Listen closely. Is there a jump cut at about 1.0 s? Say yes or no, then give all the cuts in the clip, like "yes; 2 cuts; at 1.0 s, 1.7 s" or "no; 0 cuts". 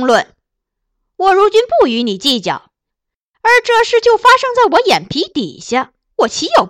no; 1 cut; at 2.9 s